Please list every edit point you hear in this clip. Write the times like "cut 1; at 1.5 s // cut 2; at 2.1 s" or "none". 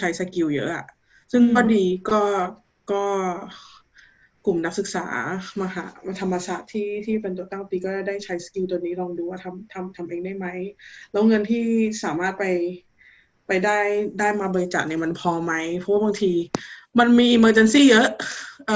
none